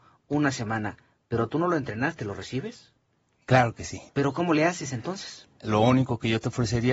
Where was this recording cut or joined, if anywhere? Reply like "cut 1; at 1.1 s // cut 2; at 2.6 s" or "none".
cut 1; at 4.1 s // cut 2; at 5.6 s

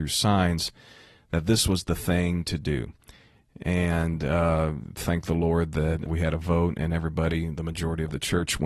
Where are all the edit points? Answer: cut 1; at 6.1 s

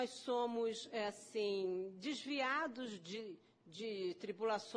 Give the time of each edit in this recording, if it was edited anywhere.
none

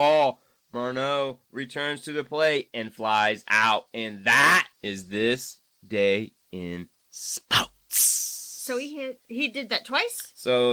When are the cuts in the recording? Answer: cut 1; at 4.7 s

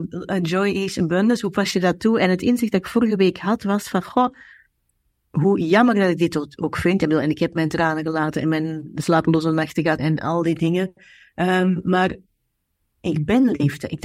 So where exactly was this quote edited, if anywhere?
cut 1; at 10.0 s

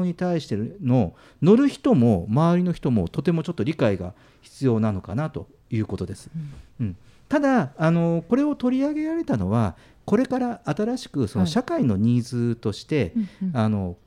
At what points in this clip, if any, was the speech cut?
none

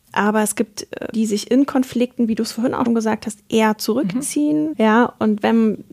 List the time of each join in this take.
cut 1; at 1.1 s // cut 2; at 2.9 s // cut 3; at 4.7 s

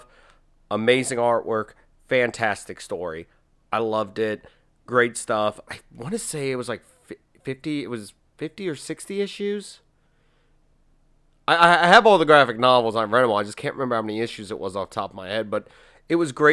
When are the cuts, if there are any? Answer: cut 1; at 5.7 s

